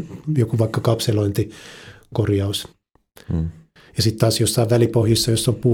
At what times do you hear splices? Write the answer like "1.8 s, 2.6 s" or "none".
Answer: none